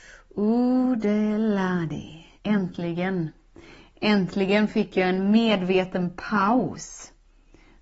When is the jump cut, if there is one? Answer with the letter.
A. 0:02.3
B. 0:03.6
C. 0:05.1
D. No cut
A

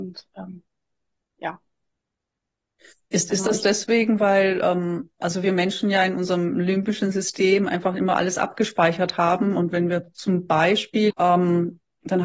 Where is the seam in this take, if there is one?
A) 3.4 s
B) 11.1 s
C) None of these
B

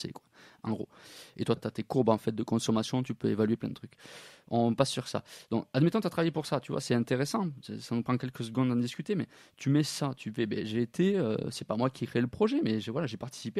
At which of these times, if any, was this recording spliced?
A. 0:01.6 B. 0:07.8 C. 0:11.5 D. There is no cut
A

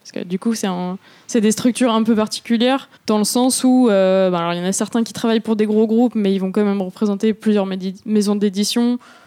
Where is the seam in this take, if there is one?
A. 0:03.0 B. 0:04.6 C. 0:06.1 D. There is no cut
A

